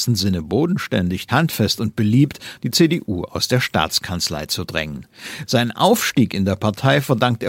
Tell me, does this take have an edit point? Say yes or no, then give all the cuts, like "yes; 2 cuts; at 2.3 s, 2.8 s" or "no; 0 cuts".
yes; 3 cuts; at 1.3 s, 2.6 s, 5.5 s